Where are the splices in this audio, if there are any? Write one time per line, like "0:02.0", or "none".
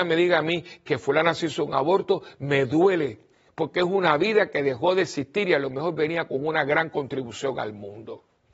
none